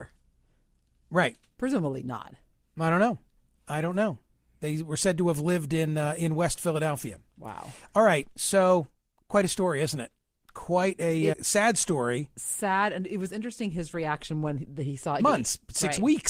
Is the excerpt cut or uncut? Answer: cut